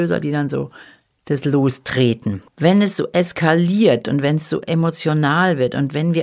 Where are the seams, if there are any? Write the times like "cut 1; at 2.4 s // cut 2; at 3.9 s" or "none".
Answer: cut 1; at 2.5 s